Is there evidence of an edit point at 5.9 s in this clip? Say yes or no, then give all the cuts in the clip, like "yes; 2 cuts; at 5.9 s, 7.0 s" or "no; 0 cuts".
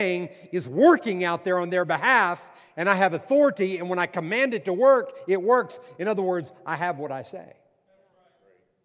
no; 0 cuts